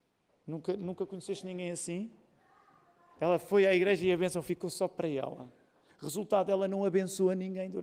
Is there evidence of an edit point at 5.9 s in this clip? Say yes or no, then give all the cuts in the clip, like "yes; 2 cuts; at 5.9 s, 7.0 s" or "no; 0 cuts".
yes; 1 cut; at 5.9 s